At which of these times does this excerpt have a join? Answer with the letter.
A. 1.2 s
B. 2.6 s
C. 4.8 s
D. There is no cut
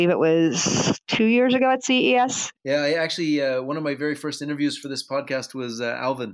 B